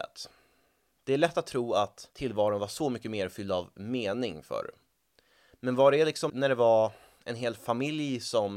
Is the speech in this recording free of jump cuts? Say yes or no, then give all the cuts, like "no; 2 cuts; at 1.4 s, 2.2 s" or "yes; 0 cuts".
no; 1 cut; at 6.3 s